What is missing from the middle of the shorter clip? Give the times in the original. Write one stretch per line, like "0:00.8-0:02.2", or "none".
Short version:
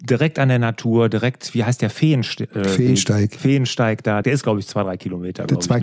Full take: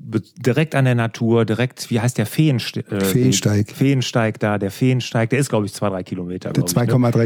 0:04.6-0:05.3